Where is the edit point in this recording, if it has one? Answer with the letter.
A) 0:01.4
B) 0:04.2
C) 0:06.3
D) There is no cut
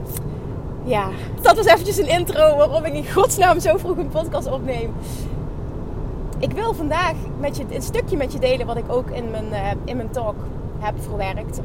A